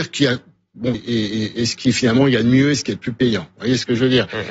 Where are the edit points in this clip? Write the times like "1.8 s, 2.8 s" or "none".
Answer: 0.9 s